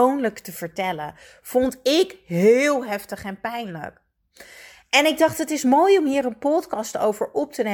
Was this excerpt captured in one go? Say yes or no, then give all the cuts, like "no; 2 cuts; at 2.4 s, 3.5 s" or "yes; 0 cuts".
yes; 0 cuts